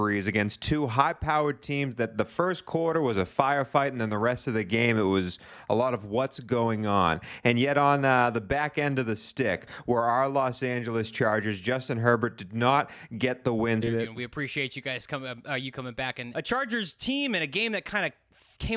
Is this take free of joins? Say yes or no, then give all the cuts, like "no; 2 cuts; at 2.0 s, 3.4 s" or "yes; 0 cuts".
no; 2 cuts; at 13.8 s, 16.3 s